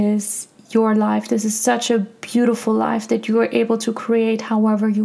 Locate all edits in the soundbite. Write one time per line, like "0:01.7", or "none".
none

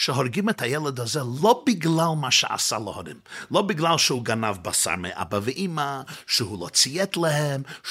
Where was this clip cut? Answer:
none

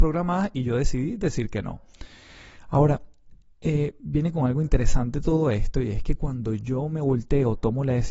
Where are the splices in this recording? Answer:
none

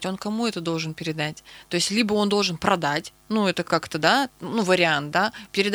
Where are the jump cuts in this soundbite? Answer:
none

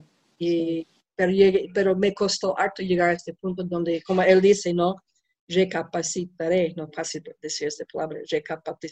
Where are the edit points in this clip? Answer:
none

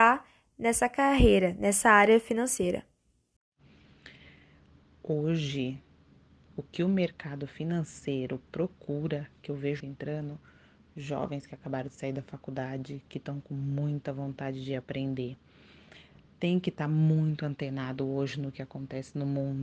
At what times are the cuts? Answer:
0:09.8

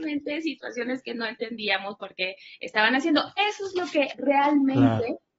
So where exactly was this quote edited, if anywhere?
none

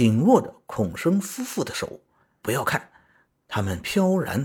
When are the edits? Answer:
0:02.4

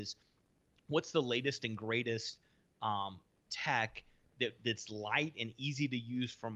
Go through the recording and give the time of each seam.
none

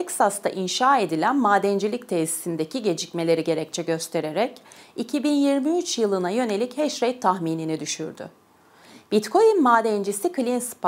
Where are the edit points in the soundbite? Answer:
0:09.1

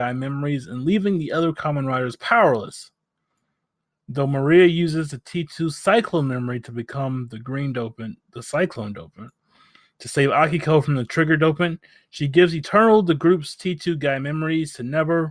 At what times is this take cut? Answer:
none

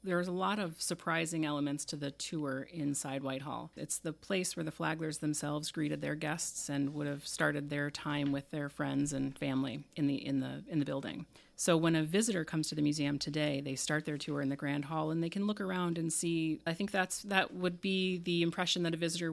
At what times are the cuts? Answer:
0:03.8
0:16.7

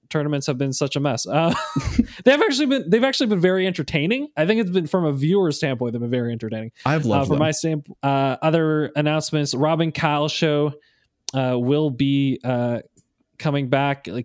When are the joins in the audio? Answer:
0:08.0

